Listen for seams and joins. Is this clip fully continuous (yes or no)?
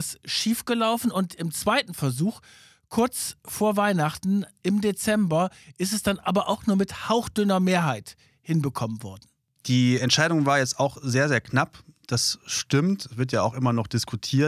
yes